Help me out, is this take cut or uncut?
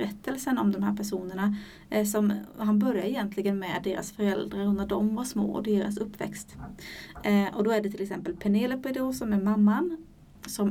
uncut